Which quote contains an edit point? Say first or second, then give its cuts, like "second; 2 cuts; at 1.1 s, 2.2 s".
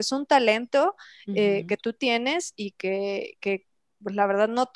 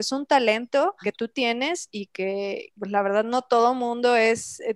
second; 2 cuts; at 1.0 s, 2.7 s